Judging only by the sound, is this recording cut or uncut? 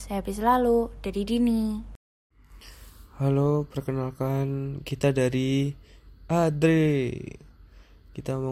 uncut